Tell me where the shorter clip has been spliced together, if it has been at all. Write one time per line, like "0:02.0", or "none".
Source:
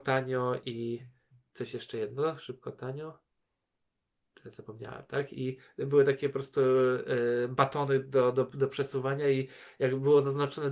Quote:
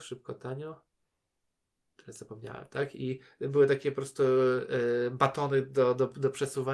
none

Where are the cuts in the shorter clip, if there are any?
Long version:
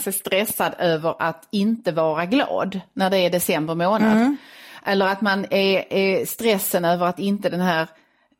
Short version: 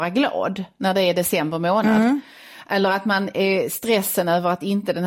0:03.3

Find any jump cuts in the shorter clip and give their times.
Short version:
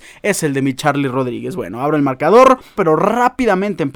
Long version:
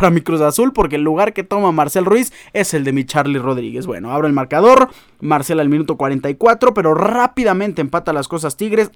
0:02.8

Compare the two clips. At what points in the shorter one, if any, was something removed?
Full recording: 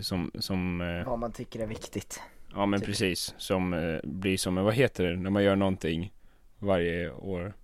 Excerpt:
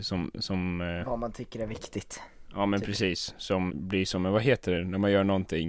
0:03.7

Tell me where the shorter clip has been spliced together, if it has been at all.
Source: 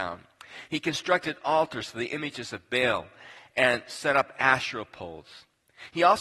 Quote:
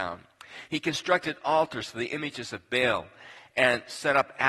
none

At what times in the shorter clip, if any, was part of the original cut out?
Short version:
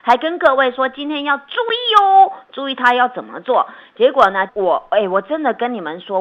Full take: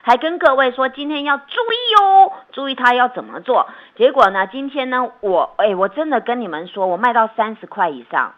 0:04.5

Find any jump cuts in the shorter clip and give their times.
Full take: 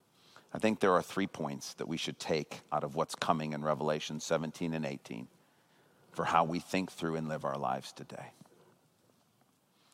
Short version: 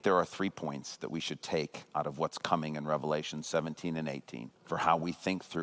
0:04.6

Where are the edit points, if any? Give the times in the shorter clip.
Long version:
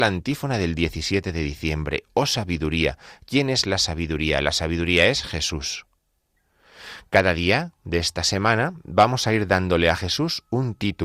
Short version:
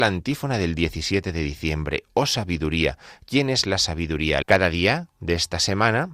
0:04.4

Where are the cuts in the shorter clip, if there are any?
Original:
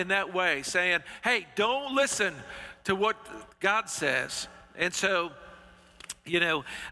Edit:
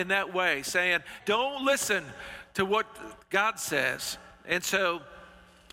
0:01.2

